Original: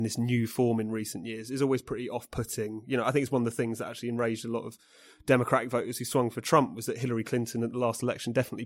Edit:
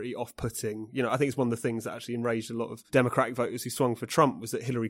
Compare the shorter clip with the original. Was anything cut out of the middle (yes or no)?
yes